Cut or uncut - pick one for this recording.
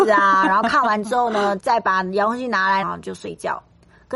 cut